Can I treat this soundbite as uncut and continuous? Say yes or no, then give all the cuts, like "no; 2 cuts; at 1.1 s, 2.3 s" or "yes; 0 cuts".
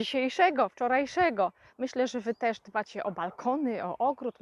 no; 1 cut; at 1.7 s